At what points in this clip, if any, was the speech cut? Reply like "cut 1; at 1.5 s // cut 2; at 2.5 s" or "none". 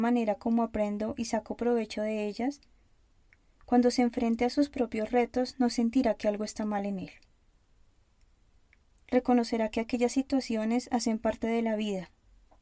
none